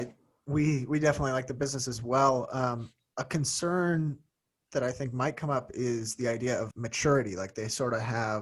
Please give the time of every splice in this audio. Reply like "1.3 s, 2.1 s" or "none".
6.7 s